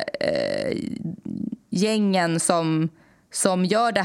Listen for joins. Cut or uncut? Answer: uncut